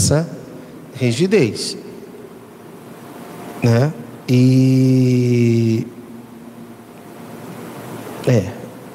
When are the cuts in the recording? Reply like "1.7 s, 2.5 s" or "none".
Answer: none